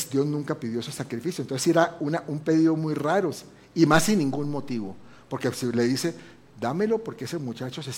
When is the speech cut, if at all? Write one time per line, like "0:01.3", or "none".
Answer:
none